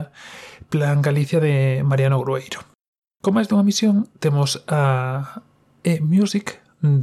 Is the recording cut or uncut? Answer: uncut